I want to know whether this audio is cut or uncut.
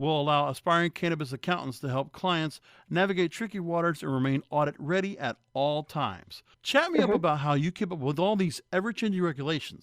cut